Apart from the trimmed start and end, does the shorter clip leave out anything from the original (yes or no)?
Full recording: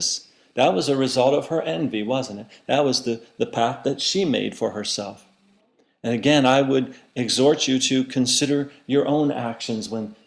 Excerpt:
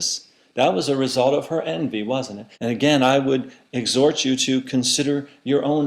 yes